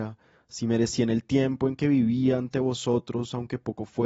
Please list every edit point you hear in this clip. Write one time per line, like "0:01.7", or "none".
none